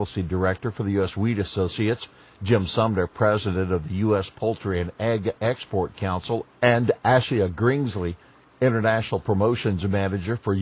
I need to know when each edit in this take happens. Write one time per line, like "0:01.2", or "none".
none